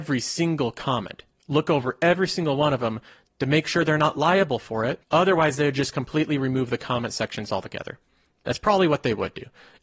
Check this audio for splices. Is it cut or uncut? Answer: cut